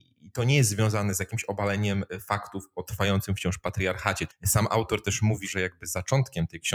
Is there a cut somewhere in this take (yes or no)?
yes